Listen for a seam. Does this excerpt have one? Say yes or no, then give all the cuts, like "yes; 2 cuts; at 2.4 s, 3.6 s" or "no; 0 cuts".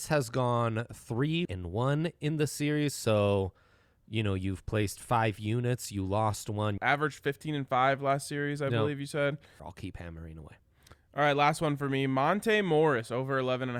yes; 3 cuts; at 1.5 s, 6.8 s, 9.6 s